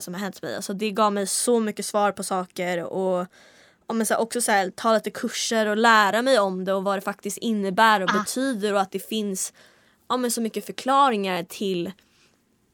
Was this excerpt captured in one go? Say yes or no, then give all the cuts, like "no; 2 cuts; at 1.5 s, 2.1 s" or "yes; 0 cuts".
yes; 0 cuts